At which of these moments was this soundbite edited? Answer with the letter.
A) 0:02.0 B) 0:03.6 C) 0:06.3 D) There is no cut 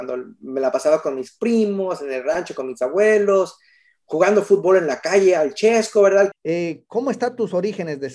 C